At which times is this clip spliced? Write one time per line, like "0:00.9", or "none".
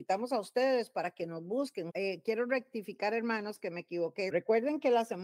0:01.9
0:04.3